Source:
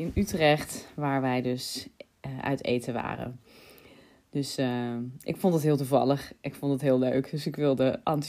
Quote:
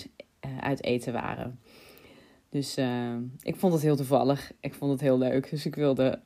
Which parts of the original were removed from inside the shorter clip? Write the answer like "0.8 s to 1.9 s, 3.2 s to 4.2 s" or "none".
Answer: none